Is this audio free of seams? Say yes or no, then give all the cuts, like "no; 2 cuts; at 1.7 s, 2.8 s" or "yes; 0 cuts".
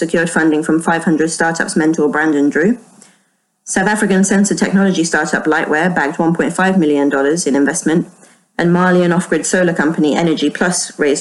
yes; 0 cuts